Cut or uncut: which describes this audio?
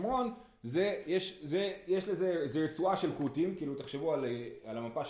uncut